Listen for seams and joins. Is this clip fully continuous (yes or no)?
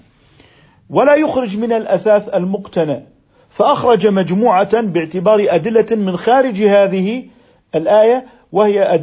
yes